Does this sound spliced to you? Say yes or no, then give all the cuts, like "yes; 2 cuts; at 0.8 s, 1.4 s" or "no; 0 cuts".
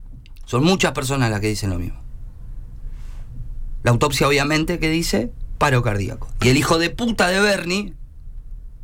no; 0 cuts